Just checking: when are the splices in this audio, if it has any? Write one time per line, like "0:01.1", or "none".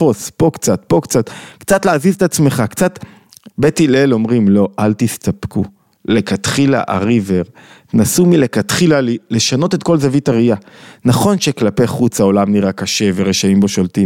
0:03.5